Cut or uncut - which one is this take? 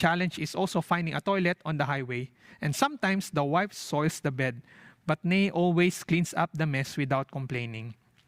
uncut